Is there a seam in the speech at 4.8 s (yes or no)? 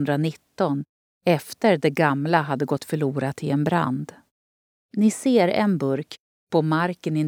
yes